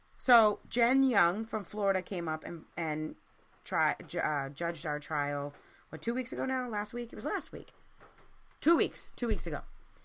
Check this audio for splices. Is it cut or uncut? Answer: uncut